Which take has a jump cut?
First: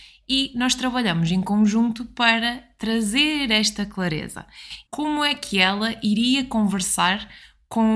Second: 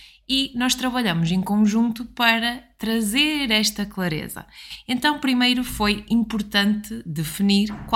first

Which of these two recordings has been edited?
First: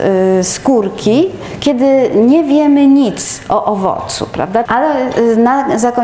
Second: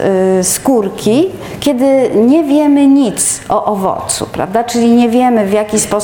first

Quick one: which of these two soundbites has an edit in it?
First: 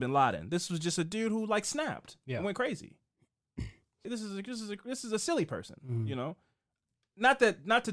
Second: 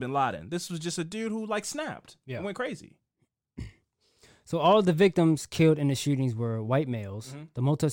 first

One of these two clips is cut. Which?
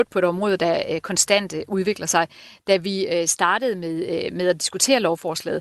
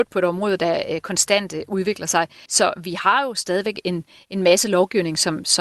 second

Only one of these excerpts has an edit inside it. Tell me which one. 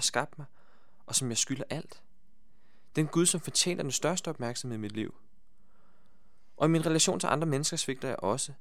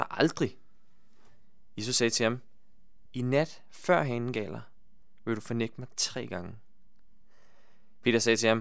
second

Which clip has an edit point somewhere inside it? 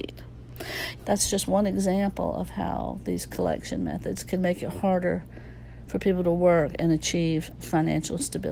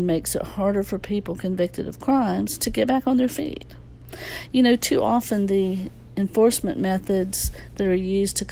first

